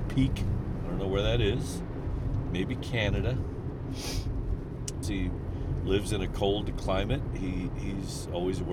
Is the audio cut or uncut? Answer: cut